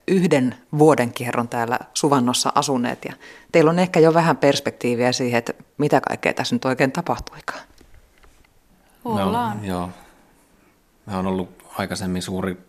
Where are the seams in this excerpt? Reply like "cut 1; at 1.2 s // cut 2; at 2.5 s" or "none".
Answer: none